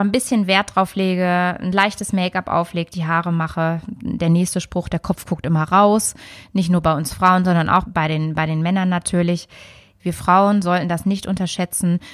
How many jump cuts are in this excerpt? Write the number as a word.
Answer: two